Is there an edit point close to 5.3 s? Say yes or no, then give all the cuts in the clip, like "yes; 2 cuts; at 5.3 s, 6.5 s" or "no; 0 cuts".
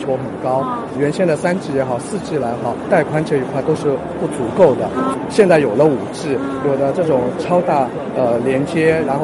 no; 0 cuts